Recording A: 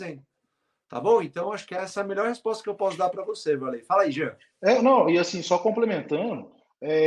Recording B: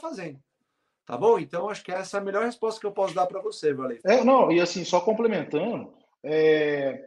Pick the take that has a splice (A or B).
B